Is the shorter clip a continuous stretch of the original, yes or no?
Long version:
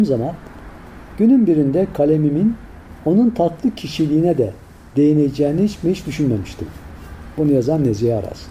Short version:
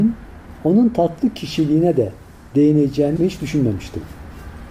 no